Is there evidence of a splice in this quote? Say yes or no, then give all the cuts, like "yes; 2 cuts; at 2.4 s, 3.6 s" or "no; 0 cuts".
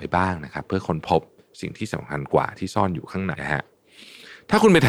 yes; 1 cut; at 3.3 s